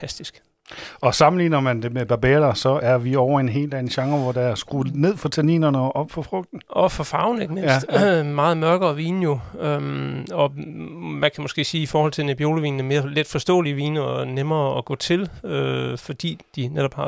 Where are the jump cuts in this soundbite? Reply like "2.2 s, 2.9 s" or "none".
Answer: none